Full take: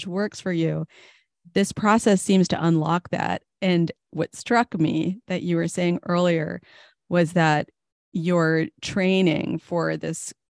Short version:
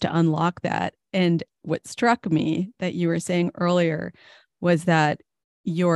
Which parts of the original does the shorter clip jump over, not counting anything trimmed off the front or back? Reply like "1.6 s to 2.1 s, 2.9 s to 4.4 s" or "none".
none